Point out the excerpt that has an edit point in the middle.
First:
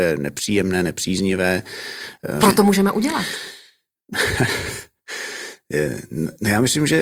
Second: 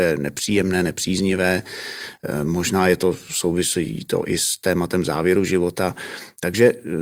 first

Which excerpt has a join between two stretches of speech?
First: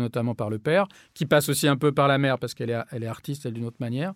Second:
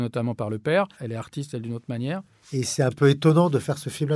second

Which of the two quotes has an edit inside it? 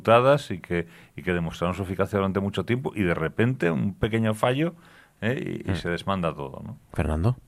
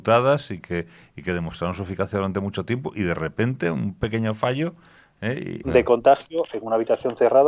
second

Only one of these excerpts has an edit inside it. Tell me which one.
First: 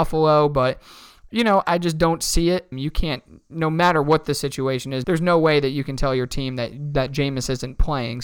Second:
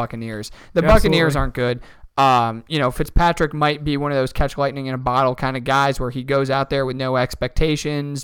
first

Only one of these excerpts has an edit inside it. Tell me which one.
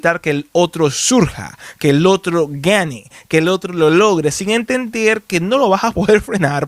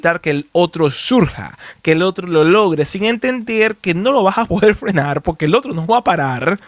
second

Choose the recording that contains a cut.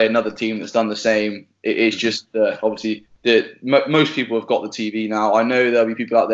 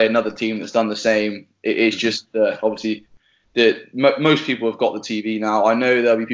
first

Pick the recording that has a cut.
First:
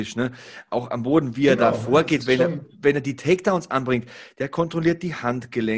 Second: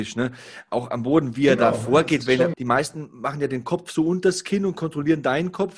second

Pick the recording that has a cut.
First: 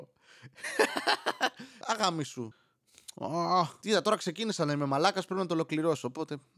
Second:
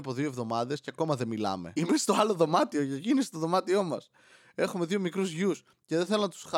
first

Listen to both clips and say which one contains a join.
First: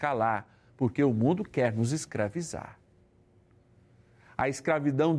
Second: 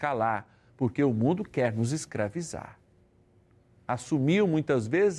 second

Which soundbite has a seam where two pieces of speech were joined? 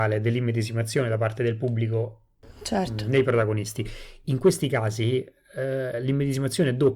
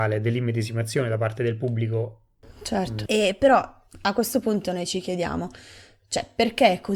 second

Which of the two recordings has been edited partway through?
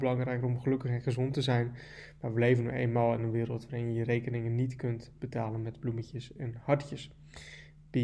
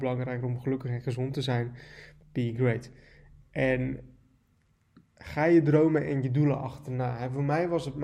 second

